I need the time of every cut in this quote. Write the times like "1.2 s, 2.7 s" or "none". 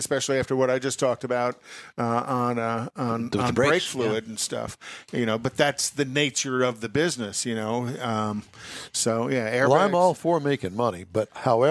none